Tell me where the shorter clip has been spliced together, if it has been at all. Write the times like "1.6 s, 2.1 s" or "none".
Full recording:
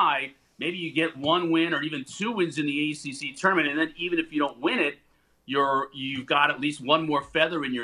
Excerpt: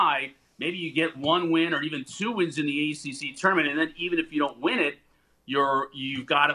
none